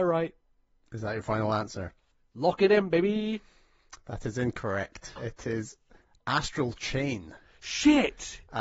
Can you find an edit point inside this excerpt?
yes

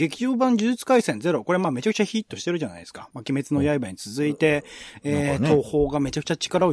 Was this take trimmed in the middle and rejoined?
no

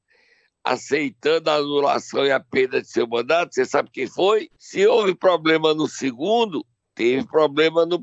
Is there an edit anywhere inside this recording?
yes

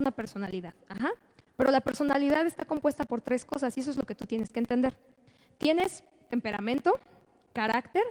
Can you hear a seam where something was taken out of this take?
no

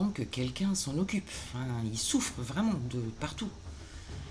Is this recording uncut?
yes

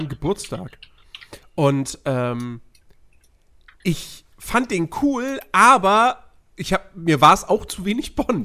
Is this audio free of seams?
yes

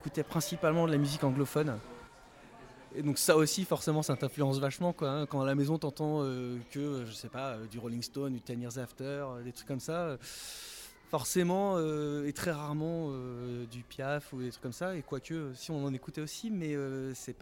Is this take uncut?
yes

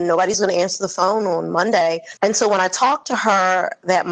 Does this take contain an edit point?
yes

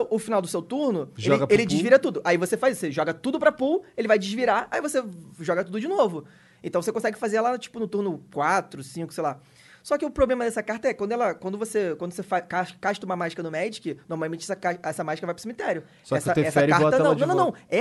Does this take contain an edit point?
no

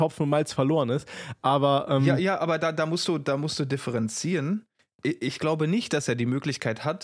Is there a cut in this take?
no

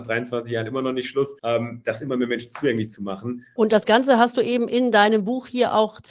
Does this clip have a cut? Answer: yes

